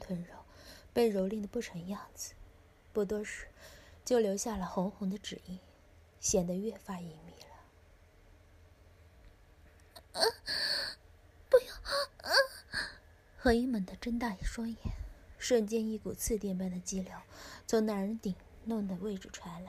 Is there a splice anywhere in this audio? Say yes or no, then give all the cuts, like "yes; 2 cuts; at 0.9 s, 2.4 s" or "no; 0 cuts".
yes; 2 cuts; at 11.5 s, 15.4 s